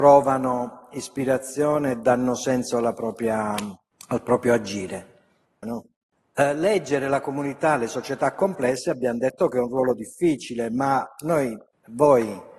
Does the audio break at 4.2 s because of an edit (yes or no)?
no